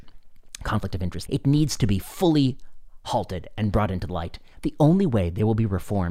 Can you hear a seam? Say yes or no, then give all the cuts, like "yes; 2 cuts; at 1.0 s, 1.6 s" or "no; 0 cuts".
yes; 2 cuts; at 1.3 s, 4.5 s